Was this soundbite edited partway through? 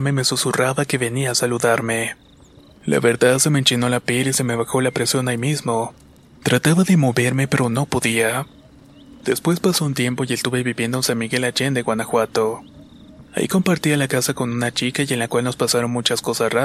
yes; 1 cut; at 9.2 s

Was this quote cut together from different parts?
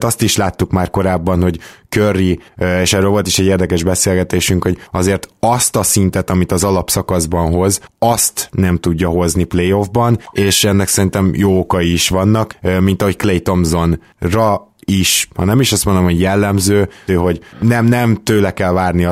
yes; 1 cut; at 17.1 s

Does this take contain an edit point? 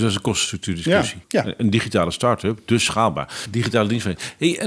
yes; 2 cuts; at 1.2 s, 3.5 s

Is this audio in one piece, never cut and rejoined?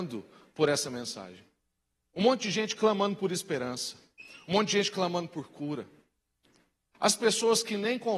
yes; 0 cuts

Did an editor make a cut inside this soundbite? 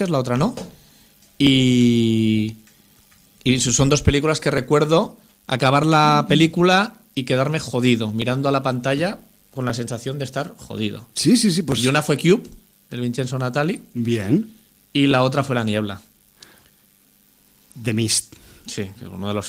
no; 0 cuts

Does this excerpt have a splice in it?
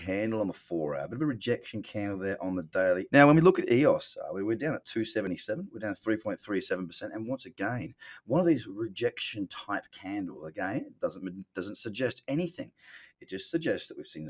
yes; 1 cut; at 3.1 s

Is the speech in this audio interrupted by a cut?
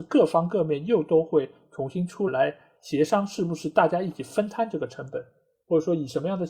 yes; 1 cut; at 2.3 s

